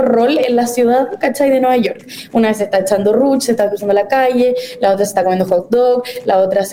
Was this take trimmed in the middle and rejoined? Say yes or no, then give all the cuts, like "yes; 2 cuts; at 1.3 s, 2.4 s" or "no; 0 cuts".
no; 0 cuts